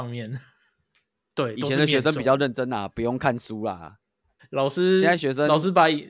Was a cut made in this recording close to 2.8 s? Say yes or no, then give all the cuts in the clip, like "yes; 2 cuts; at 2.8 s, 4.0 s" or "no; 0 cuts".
no; 2 cuts; at 1.3 s, 4.4 s